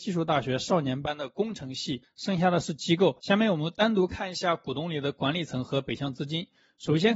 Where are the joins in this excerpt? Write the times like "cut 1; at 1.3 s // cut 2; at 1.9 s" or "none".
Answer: cut 1; at 2.0 s